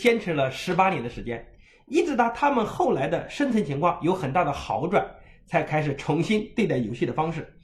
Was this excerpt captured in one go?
yes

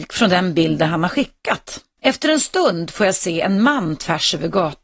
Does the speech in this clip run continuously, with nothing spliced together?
no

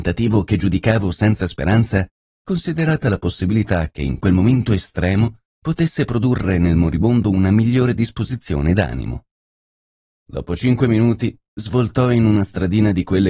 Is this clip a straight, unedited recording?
no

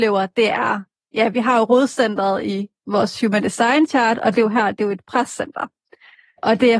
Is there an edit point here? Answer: no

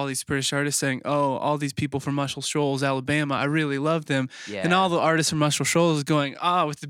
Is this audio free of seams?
yes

